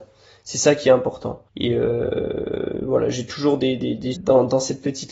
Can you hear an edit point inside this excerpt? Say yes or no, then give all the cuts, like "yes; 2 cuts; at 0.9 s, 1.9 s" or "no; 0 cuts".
yes; 2 cuts; at 1.5 s, 4.1 s